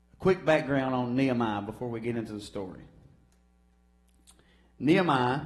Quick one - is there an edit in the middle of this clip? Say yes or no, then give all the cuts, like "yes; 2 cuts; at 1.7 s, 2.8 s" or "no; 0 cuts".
no; 0 cuts